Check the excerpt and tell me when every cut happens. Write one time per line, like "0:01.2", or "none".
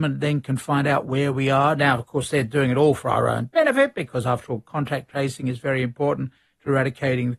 none